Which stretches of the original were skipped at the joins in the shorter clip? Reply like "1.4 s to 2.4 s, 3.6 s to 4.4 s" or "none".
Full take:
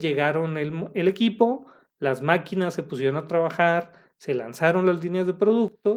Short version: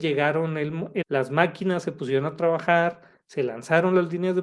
1.0 s to 1.9 s